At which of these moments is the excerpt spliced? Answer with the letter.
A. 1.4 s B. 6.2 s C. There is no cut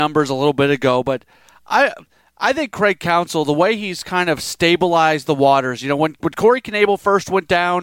C